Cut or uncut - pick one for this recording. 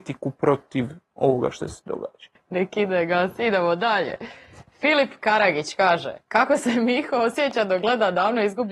cut